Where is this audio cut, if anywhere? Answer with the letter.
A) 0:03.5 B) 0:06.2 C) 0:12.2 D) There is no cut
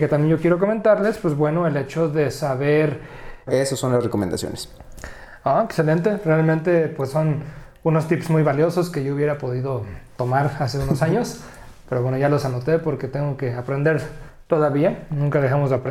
A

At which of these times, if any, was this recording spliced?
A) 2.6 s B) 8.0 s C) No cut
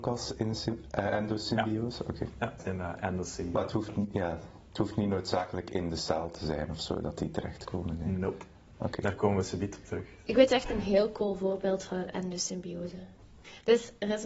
A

